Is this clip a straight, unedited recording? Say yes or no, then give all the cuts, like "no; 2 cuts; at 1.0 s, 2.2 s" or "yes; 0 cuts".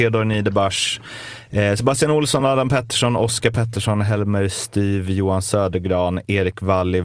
yes; 0 cuts